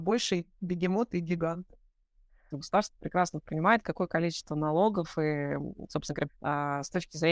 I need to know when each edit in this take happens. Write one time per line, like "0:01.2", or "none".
0:02.5
0:06.3